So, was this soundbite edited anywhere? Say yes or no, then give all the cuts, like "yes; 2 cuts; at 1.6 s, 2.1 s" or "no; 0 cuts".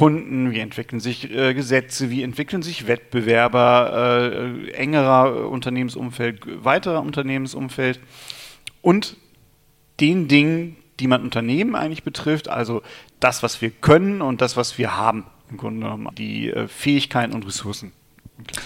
yes; 1 cut; at 16.1 s